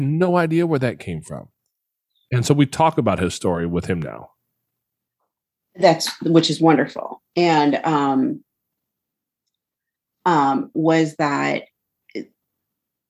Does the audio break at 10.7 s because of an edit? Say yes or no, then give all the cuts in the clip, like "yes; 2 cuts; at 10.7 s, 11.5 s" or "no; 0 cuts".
yes; 1 cut; at 10.7 s